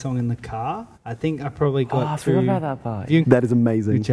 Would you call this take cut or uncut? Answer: cut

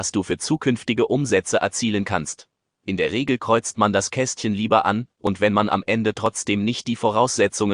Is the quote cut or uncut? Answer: uncut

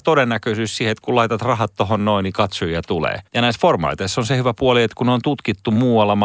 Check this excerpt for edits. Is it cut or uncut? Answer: cut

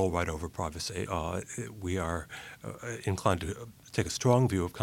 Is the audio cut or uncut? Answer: cut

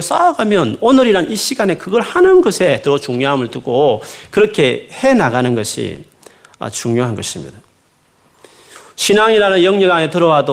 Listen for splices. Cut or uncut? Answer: uncut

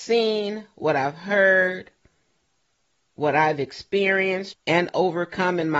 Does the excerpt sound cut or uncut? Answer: cut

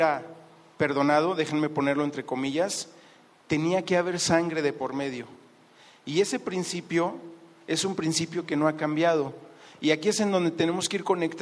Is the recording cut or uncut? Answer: uncut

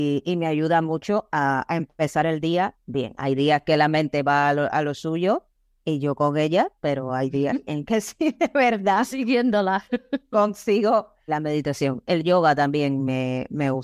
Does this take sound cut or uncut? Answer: cut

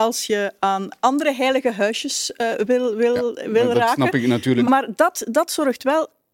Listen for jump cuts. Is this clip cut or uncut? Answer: cut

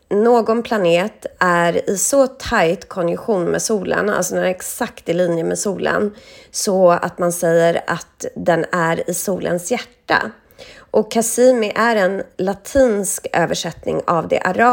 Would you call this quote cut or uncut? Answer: uncut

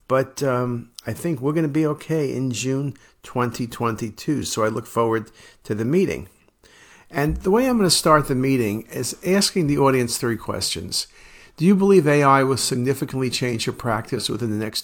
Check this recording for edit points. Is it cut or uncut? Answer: uncut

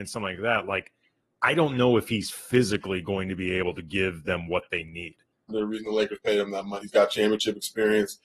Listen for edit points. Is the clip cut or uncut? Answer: cut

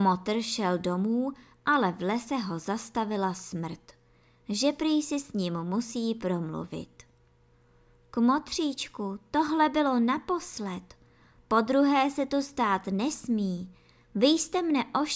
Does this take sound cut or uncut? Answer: uncut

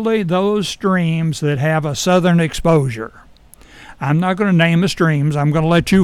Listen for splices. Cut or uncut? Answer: uncut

